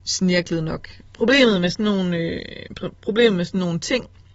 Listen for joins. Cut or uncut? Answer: uncut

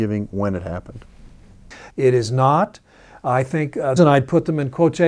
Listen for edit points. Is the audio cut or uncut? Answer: cut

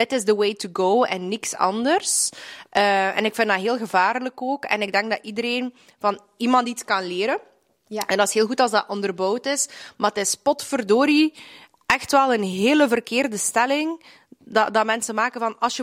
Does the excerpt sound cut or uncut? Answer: uncut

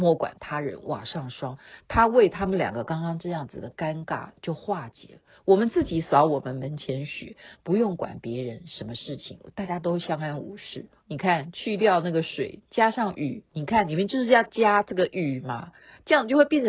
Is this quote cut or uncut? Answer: cut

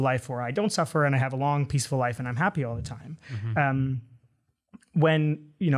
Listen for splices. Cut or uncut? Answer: uncut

